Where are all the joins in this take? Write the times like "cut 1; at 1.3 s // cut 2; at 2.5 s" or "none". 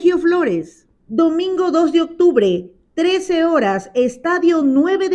none

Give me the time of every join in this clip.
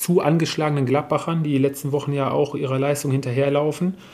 none

